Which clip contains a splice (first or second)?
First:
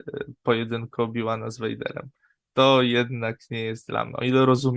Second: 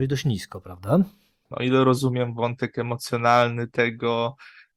second